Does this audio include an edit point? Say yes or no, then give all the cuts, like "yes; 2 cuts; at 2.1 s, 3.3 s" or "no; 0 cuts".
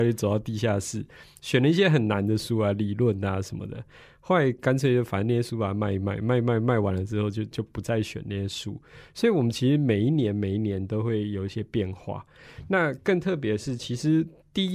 no; 0 cuts